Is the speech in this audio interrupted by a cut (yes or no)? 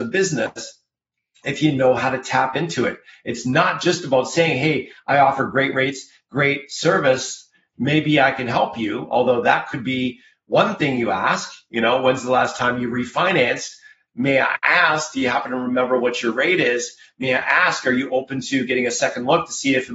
no